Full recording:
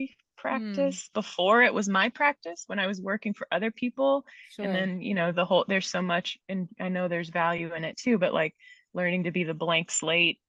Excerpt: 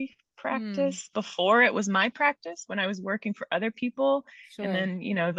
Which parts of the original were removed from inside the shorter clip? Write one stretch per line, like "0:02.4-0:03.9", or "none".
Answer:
none